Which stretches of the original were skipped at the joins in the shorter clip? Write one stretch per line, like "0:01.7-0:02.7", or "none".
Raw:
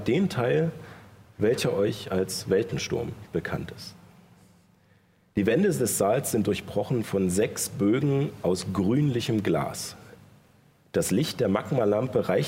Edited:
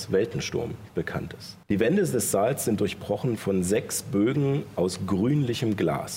0:04.0-0:05.3